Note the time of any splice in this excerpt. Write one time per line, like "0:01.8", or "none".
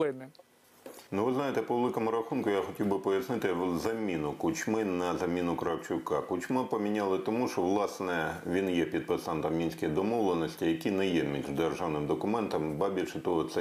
0:01.1